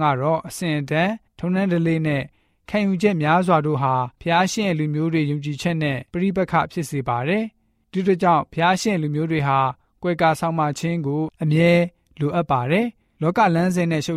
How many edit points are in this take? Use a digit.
3